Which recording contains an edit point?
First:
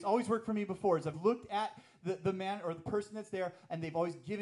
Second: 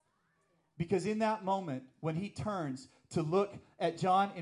first; 1 cut; at 1.1 s

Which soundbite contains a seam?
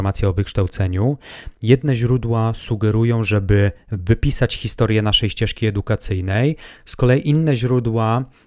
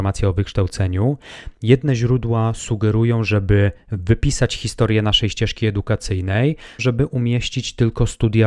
second; 1 cut; at 6.8 s

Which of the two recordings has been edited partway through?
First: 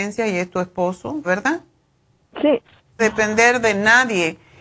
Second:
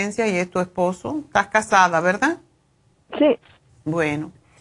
first; 2 cuts; at 1.2 s, 3.0 s

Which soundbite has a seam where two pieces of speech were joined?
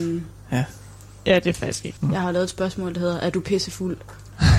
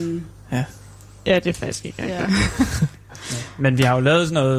first; 1 cut; at 2.0 s

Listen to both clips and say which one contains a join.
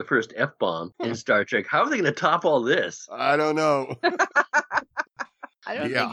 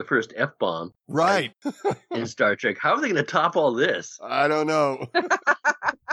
first; 1 cut; at 0.9 s

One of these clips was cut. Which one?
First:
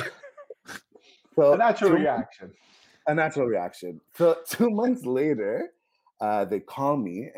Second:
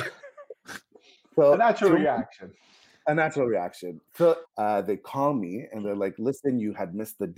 second; 1 cut; at 4.4 s

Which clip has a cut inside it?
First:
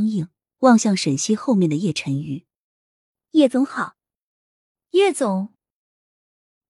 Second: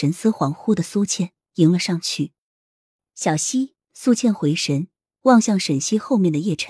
second; 2 cuts; at 3.8 s, 5.0 s

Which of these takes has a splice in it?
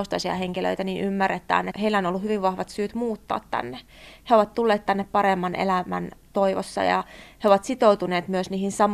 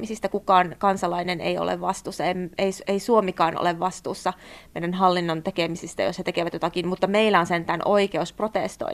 first; 1 cut; at 1.7 s

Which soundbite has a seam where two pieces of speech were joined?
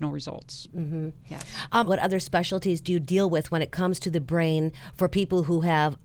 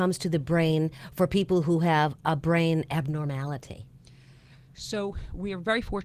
first; 1 cut; at 1.9 s

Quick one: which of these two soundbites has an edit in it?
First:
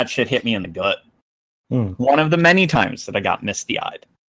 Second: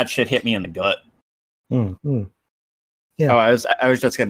second; 1 cut; at 2.0 s

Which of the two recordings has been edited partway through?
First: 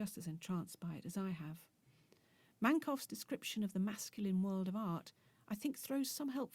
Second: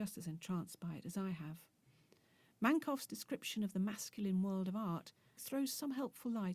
second; 1 cut; at 5.4 s

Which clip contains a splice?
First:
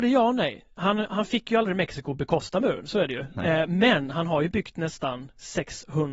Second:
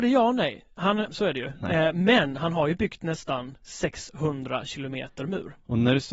second; 1 cut; at 1.1 s

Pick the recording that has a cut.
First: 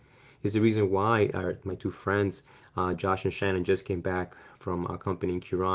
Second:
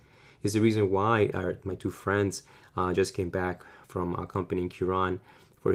second; 1 cut; at 2.9 s

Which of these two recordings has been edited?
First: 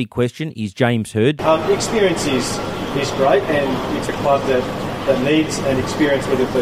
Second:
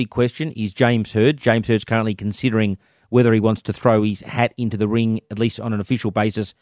first; 2 cuts; at 1.4 s, 4.1 s

